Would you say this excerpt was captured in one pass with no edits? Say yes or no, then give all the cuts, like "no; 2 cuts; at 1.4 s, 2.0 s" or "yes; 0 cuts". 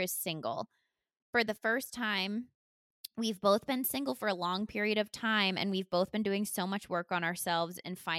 yes; 0 cuts